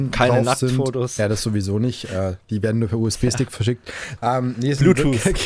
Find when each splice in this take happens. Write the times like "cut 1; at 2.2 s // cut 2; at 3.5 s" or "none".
cut 1; at 4.2 s